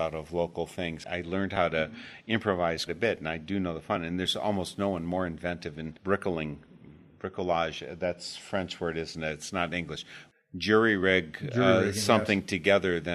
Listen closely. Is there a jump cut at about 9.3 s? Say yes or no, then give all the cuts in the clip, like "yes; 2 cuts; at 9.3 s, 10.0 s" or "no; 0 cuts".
no; 1 cut; at 2.9 s